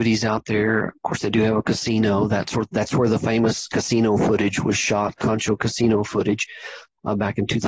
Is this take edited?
no; 0 cuts

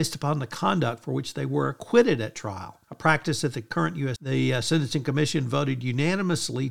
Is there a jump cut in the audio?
yes; 2 cuts; at 2.8 s, 4.2 s

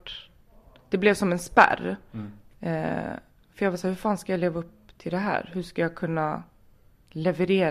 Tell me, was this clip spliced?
no; 0 cuts

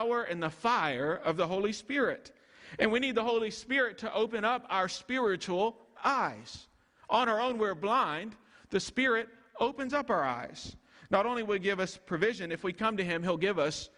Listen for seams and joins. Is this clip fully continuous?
yes; 0 cuts

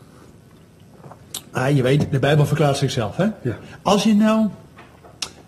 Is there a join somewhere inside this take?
no; 0 cuts

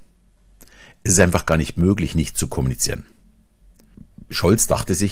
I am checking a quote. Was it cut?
no; 0 cuts

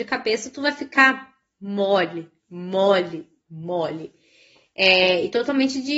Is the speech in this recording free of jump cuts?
yes; 0 cuts

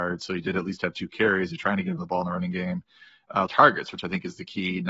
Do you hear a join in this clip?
yes; 1 cut; at 3.5 s

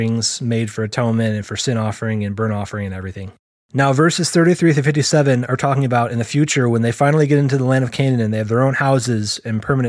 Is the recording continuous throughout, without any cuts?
yes; 0 cuts

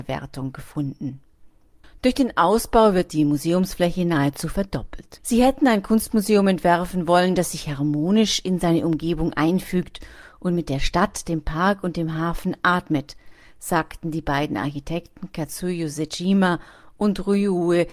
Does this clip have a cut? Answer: yes; 1 cut; at 5.2 s

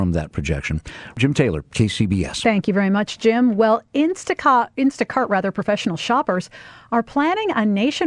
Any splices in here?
no; 0 cuts

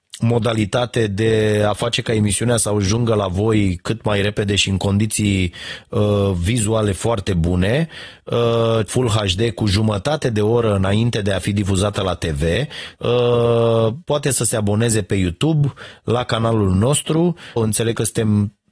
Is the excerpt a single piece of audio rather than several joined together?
no; 3 cuts; at 8.9 s, 12.9 s, 17.6 s

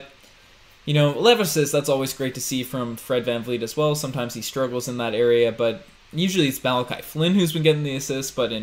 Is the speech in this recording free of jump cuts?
yes; 0 cuts

